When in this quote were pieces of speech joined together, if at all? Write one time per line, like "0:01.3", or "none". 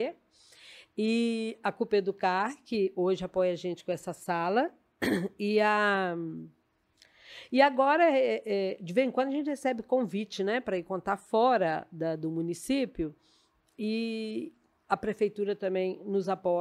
none